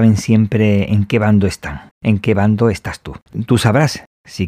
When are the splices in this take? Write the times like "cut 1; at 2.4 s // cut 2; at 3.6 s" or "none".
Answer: cut 1; at 1.9 s // cut 2; at 3.3 s